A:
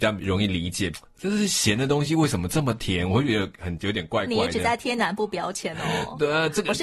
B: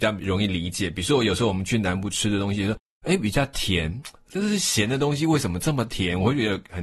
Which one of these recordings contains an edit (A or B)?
A